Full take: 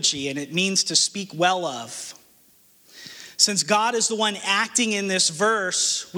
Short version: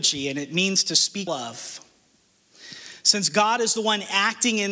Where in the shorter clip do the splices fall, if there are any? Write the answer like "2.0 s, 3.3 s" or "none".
1.3 s